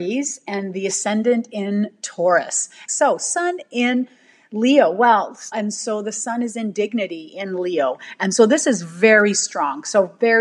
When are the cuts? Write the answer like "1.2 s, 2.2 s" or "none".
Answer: 2.9 s, 5.5 s